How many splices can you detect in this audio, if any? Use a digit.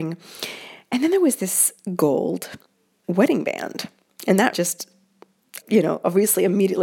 2